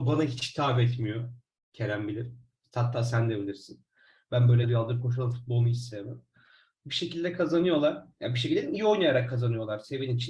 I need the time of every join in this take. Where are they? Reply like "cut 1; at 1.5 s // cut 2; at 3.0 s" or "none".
cut 1; at 4.6 s